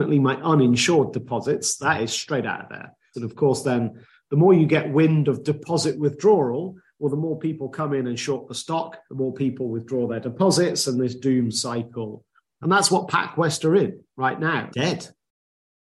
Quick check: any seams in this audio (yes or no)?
yes